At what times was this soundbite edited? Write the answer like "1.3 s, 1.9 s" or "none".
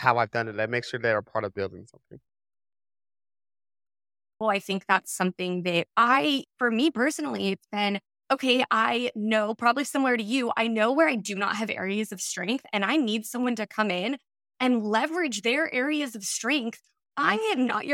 4.4 s, 5.9 s